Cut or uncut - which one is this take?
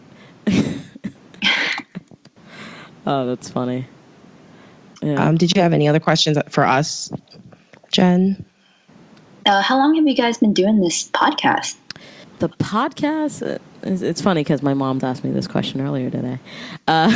cut